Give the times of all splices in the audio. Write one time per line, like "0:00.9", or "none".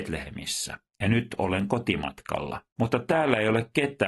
0:02.7

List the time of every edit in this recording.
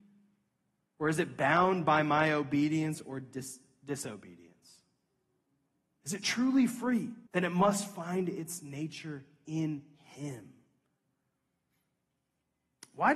0:07.3

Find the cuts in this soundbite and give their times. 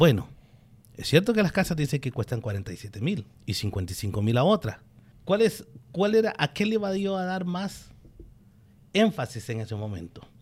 0:03.3
0:05.1

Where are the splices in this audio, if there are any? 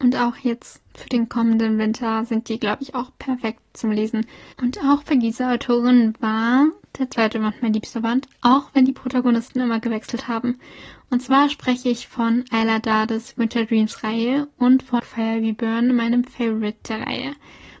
0:04.5
0:15.0

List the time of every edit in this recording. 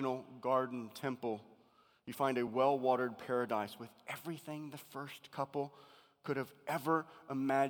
none

